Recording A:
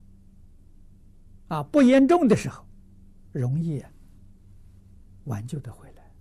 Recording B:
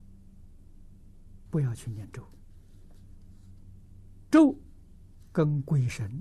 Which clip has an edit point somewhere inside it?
B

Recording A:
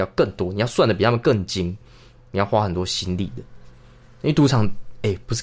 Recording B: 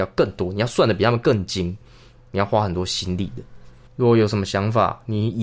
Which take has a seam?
B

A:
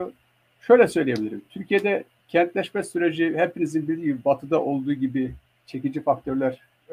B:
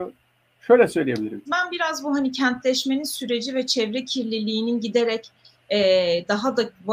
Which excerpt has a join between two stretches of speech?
B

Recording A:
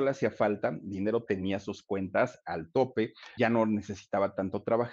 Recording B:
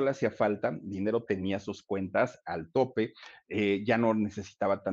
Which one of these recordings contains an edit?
A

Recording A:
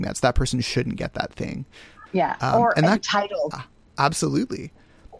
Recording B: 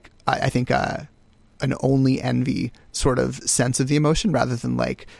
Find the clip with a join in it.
A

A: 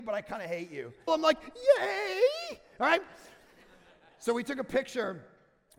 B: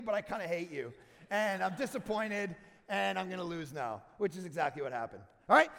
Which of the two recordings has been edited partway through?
A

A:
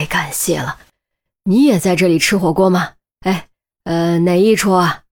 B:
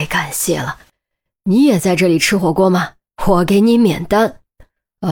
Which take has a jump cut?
B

